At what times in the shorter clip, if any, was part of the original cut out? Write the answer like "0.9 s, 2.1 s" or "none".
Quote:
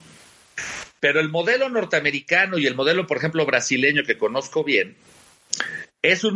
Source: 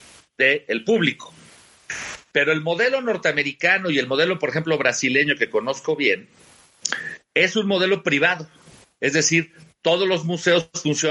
none